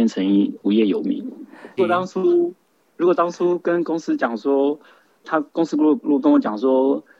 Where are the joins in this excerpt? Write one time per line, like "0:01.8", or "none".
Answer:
0:01.8
0:05.2